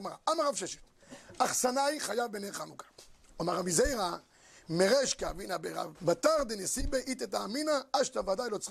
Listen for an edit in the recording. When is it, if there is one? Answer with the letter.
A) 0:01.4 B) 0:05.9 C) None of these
B